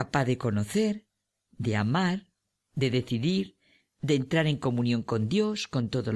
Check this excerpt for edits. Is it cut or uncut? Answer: uncut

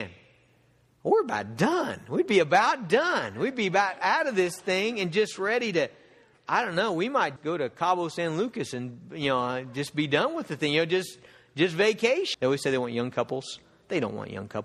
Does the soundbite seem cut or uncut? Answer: cut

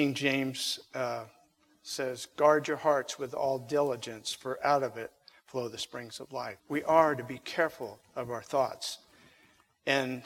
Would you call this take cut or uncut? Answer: cut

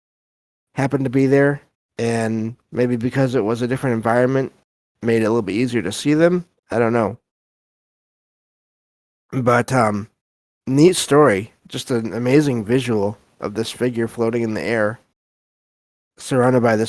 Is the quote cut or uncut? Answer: uncut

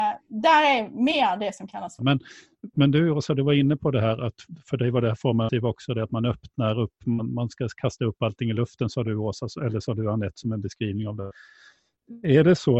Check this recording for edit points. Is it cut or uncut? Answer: cut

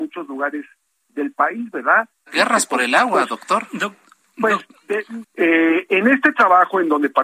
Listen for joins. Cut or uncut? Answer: cut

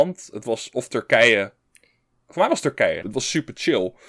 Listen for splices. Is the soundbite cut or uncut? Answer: cut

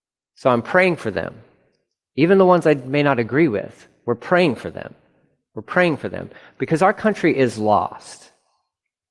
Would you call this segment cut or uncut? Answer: uncut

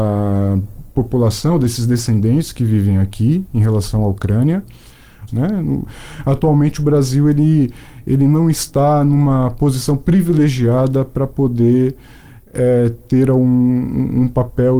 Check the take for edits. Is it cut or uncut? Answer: cut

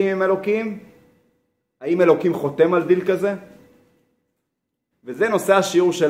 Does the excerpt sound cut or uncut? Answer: cut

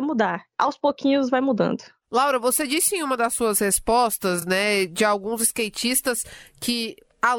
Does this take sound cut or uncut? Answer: uncut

